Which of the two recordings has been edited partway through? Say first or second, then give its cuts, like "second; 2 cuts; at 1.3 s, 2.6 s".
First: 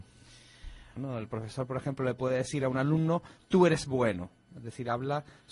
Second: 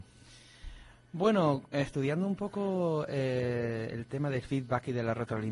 first; 1 cut; at 1.0 s